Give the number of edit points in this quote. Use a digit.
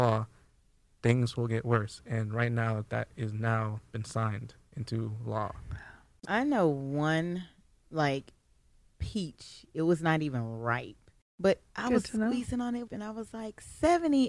3